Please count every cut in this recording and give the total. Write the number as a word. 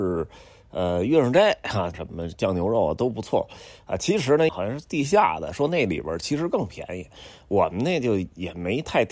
two